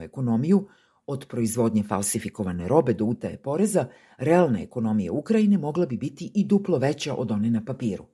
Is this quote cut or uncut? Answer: uncut